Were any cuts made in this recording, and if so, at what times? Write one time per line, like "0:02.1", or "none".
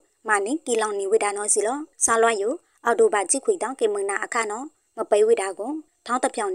0:01.9